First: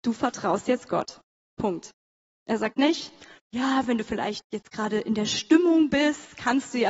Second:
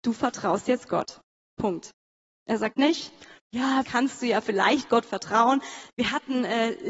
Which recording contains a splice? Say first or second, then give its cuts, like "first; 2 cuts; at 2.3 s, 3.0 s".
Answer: second; 2 cuts; at 3.8 s, 5.9 s